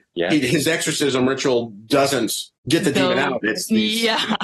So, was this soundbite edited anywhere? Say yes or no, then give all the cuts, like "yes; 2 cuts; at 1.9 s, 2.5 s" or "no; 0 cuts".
yes; 1 cut; at 2.5 s